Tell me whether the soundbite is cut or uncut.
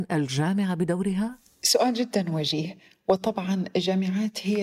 uncut